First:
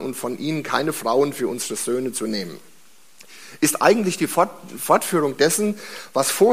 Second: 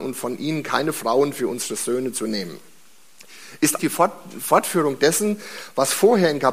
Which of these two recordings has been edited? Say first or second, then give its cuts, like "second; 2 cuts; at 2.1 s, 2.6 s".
second; 1 cut; at 3.8 s